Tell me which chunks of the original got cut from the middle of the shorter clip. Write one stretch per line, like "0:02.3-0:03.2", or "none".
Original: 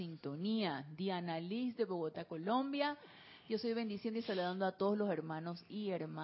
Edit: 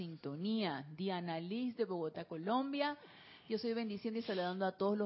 none